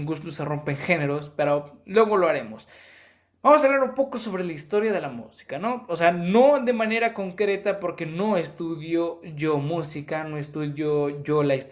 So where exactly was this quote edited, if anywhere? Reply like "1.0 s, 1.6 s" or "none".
none